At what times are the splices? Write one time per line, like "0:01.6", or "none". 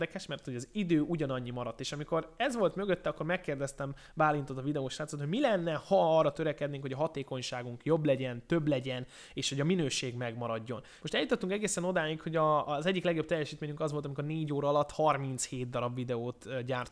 0:11.0